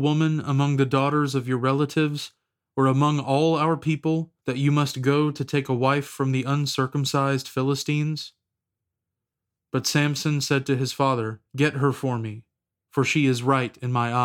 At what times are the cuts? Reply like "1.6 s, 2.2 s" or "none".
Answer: 4.4 s, 11.5 s